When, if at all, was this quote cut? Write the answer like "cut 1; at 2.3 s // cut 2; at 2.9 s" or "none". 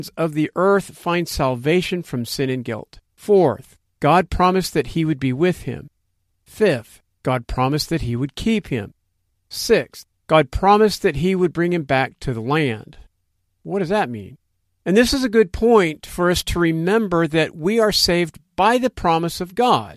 cut 1; at 3.1 s // cut 2; at 14.7 s